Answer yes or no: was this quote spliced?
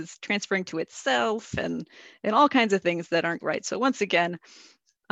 yes